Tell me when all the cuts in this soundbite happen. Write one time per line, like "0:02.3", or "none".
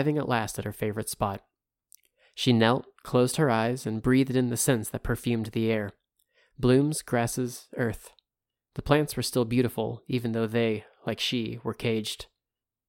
none